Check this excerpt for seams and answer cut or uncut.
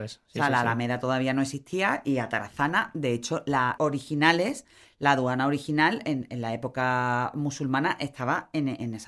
cut